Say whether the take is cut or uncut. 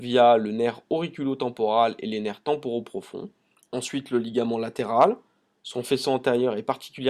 cut